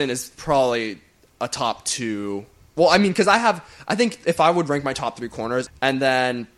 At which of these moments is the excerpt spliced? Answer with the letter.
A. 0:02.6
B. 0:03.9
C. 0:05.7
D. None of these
C